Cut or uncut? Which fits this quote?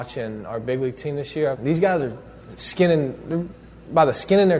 cut